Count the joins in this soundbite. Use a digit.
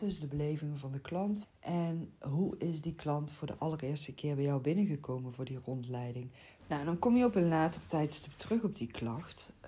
2